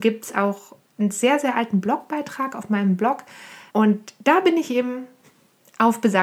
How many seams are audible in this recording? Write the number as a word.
one